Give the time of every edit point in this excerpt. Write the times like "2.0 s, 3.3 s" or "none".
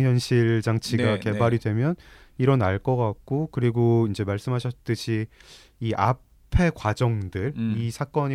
none